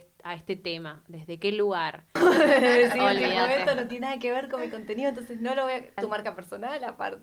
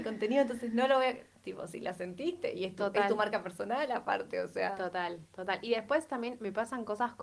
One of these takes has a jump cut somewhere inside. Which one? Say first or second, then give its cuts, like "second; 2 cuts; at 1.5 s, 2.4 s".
first; 2 cuts; at 2.2 s, 6.0 s